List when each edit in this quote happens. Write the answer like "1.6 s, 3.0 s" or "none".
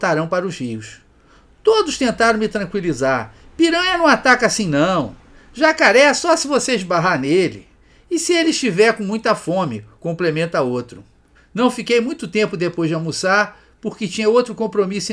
11.3 s